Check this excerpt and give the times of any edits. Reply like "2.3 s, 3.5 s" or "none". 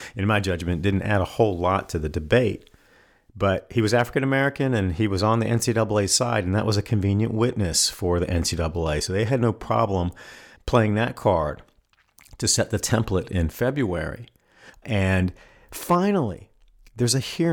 14.7 s